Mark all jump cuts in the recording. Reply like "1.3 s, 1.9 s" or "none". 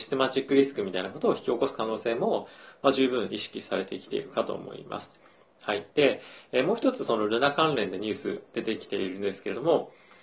none